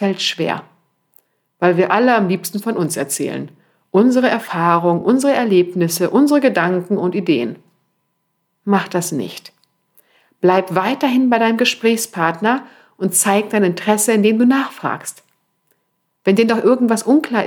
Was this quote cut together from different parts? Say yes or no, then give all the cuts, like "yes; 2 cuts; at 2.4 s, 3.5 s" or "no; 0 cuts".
no; 0 cuts